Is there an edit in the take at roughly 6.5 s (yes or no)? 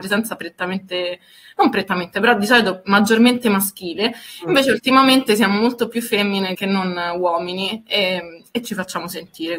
yes